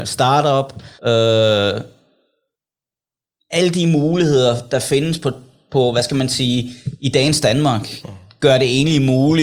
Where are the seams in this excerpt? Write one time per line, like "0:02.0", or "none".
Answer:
0:01.0